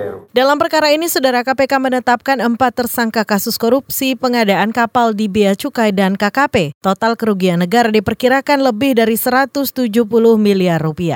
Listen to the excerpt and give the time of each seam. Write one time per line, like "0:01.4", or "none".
none